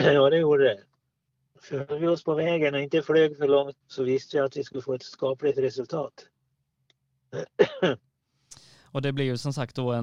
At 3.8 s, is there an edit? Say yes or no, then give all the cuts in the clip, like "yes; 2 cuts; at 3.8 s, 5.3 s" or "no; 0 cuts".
yes; 2 cuts; at 1.5 s, 3.8 s